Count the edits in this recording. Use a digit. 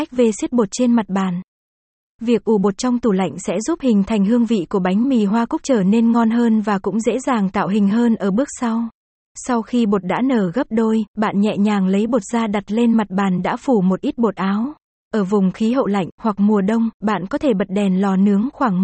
3